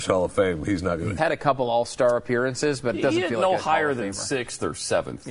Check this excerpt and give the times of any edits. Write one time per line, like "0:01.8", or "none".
0:01.2